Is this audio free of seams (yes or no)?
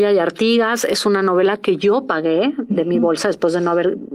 no